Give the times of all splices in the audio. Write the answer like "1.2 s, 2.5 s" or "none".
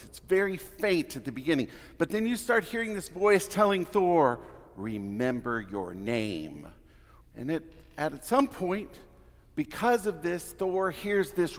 7.2 s